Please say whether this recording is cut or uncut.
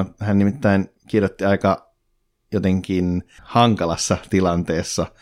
cut